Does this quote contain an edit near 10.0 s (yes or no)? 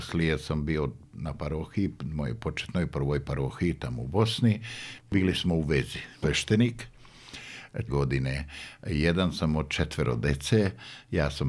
no